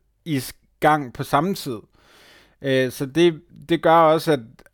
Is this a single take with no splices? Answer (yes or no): yes